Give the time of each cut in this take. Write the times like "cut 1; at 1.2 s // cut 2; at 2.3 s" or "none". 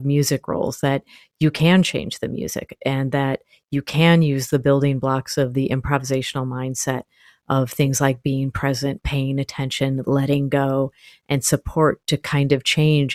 cut 1; at 10.1 s